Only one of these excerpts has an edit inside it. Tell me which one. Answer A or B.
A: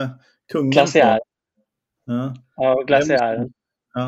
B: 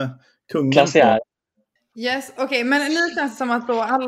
B